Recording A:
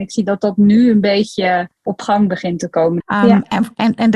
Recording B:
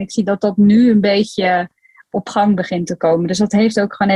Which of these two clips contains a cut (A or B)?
A